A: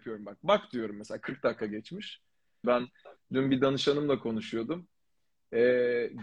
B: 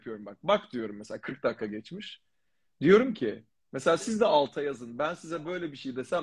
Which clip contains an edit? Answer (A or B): A